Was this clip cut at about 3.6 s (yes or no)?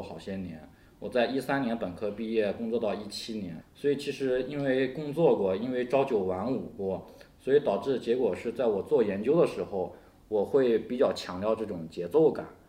yes